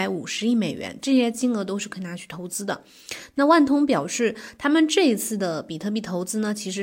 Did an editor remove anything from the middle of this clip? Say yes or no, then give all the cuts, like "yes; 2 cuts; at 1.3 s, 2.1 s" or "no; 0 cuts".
no; 0 cuts